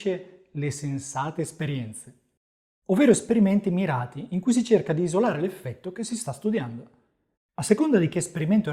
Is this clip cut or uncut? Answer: cut